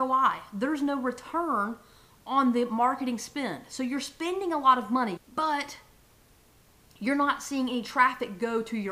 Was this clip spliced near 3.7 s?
no; 1 cut; at 5.2 s

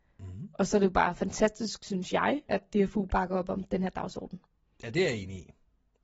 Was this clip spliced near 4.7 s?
no; 1 cut; at 2.5 s

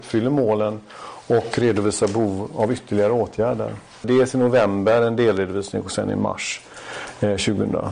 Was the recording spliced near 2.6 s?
no; 1 cut; at 4.0 s

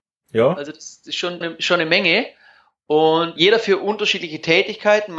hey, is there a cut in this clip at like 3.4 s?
yes; 2 cuts; at 1.4 s, 3.4 s

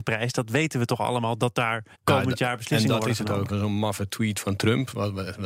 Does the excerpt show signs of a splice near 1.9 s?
yes; 2 cuts; at 1.9 s, 3.5 s

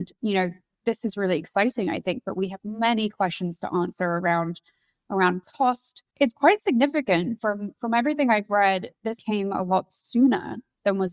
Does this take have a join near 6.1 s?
yes; 2 cuts; at 6.1 s, 9.2 s

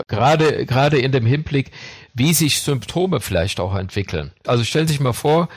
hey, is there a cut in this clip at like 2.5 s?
no; 1 cut; at 4.4 s

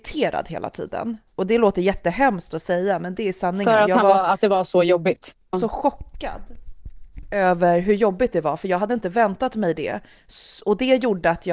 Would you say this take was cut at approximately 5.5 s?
yes; 1 cut; at 5.5 s

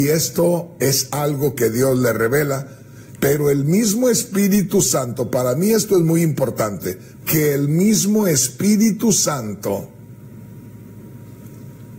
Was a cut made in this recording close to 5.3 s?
no; 2 cuts; at 3.2 s, 7.2 s

